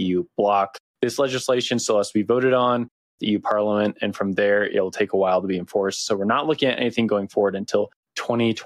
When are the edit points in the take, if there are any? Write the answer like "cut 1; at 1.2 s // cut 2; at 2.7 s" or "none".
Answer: none